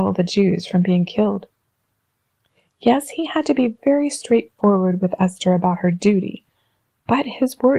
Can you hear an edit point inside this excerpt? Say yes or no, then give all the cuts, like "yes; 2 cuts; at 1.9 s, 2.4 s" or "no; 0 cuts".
no; 0 cuts